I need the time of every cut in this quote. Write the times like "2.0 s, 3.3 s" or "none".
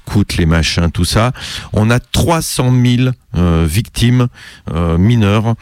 none